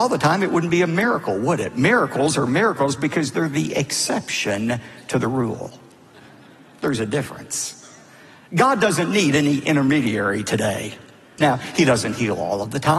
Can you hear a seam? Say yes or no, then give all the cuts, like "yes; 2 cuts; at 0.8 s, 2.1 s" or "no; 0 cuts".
yes; 2 cuts; at 6.1 s, 11.4 s